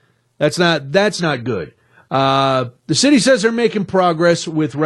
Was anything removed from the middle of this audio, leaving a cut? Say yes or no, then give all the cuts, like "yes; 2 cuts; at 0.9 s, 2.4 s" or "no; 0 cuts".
no; 0 cuts